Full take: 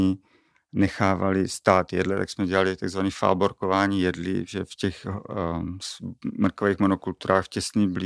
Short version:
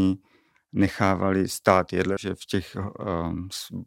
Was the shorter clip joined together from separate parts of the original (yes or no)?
yes